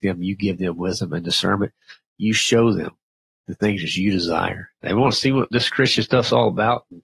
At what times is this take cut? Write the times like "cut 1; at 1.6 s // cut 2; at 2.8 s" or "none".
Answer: cut 1; at 4.8 s